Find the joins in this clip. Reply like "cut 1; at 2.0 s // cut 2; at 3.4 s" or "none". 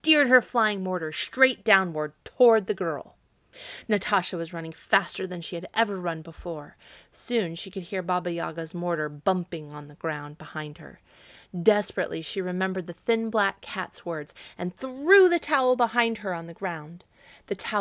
none